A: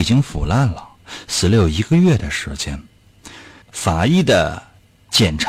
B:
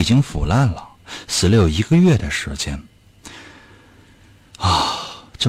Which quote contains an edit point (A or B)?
A